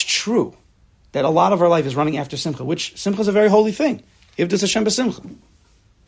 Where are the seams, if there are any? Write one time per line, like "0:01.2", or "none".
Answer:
none